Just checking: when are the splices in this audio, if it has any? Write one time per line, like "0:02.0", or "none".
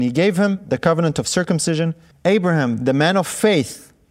0:02.1

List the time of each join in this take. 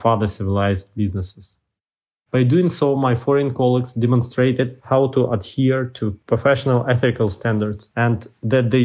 0:02.3

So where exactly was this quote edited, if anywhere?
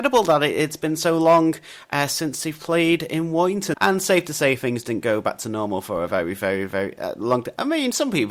0:03.7

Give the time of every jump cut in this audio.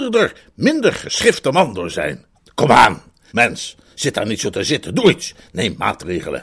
0:03.3

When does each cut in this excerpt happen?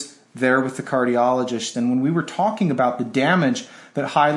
0:01.7

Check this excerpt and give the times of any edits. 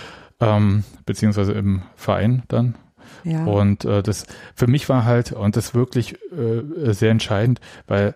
none

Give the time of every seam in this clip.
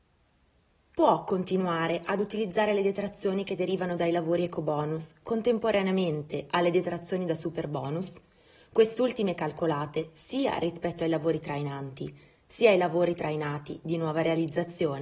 none

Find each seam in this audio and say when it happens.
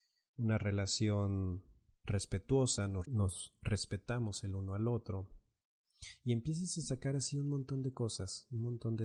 0:03.0

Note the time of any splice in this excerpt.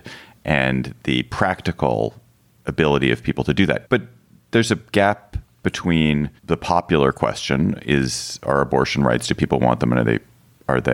0:03.8
0:06.4

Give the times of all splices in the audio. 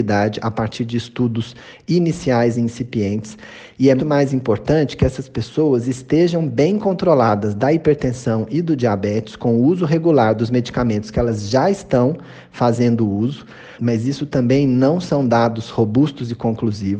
0:04.0
0:13.8

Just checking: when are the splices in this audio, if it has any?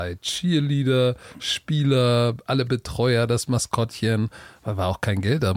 none

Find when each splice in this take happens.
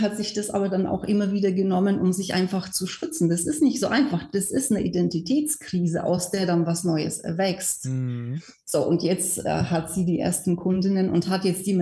none

